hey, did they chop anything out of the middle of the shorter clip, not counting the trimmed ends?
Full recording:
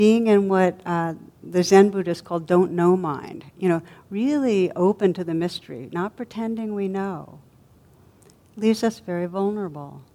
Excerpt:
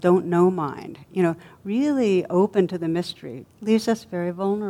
yes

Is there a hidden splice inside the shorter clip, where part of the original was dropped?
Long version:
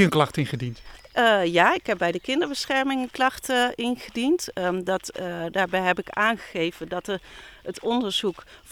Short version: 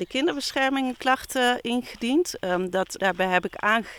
yes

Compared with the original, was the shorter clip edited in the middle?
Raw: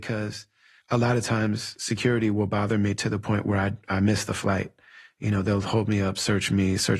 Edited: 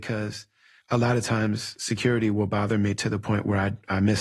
no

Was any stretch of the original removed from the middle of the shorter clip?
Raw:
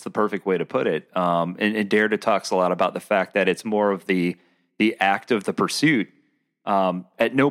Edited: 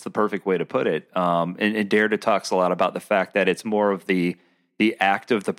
no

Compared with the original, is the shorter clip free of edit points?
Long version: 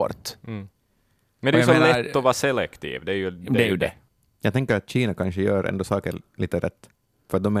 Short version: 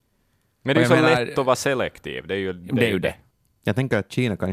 yes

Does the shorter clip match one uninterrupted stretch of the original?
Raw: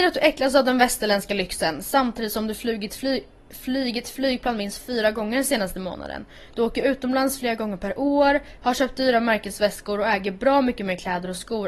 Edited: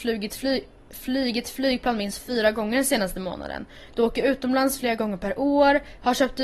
yes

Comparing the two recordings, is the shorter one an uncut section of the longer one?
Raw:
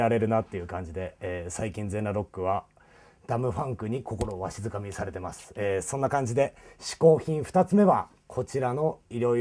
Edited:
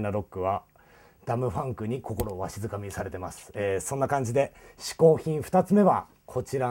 yes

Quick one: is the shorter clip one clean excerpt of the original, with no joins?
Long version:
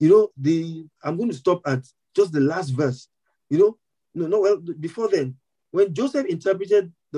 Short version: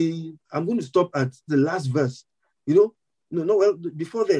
no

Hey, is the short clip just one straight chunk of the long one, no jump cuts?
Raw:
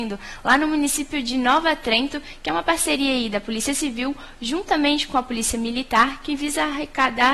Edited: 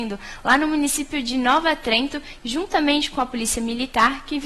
no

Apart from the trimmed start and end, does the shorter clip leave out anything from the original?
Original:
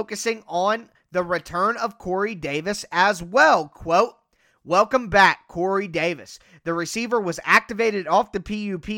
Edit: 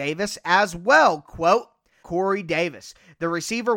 yes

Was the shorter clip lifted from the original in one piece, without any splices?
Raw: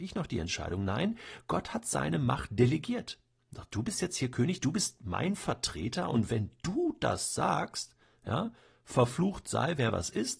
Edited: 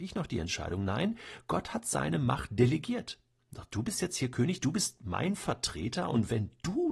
yes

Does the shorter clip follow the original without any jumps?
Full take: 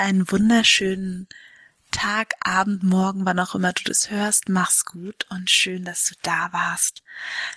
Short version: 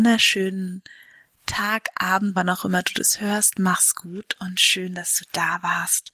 no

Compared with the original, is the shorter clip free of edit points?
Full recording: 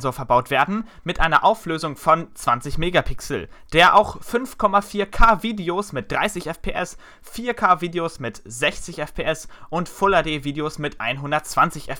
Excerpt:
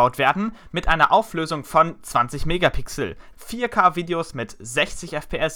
no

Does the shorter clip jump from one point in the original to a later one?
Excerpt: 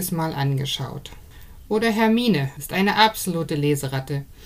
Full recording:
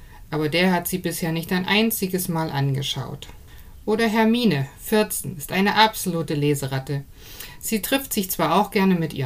yes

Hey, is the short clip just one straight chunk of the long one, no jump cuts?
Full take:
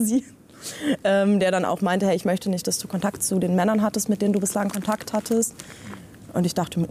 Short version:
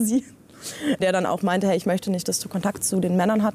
no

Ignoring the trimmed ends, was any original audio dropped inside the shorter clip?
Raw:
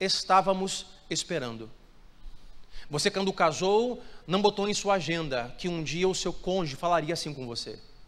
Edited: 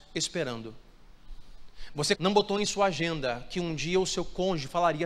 yes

